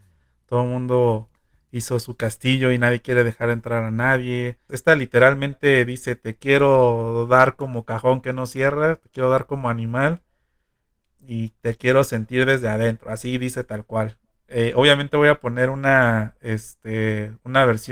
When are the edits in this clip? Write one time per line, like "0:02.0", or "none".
0:04.7

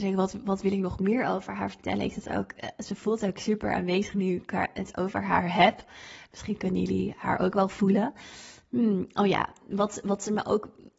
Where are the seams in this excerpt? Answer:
none

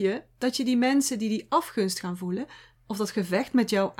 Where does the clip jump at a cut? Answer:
none

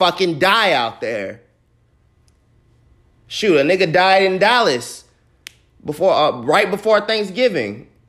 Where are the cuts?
none

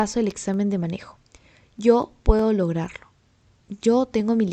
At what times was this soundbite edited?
none

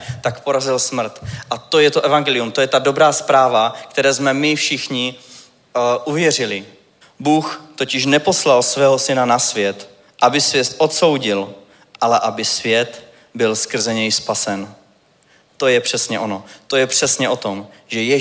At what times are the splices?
0:07.0

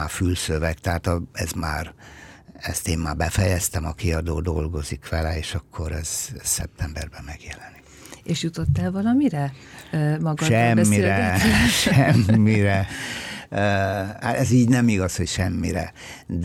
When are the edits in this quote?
none

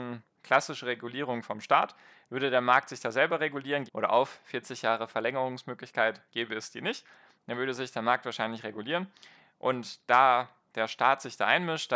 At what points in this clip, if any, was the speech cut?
0:03.9

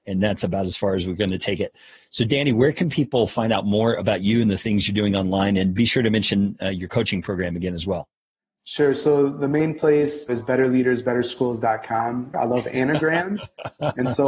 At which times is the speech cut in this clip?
0:10.3
0:12.3

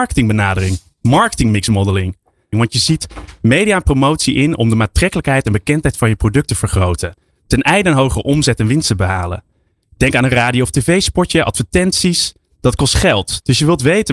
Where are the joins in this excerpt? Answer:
0:02.5

